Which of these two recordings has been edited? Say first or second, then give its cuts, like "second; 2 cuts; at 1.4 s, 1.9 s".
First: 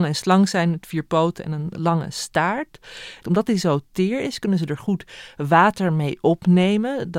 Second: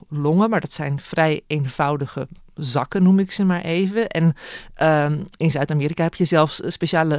first; 1 cut; at 3.2 s